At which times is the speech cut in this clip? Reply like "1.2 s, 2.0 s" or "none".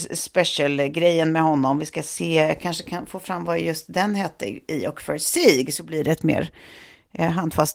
none

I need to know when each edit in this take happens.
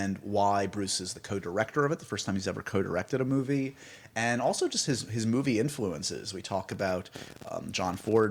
none

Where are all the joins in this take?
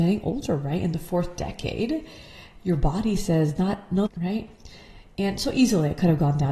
4.1 s

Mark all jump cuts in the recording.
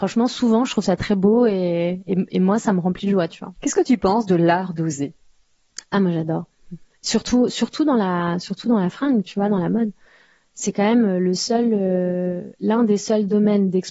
none

